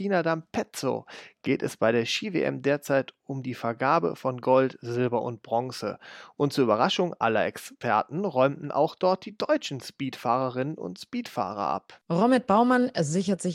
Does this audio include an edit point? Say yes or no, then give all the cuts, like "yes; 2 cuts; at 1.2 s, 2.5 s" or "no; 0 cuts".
no; 0 cuts